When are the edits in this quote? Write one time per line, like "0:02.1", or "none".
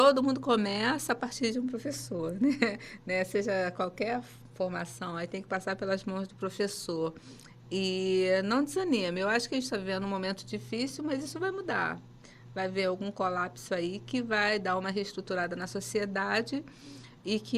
none